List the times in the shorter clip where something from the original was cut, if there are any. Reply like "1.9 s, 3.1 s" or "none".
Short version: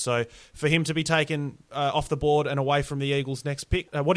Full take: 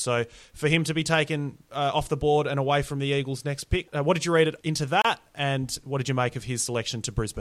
none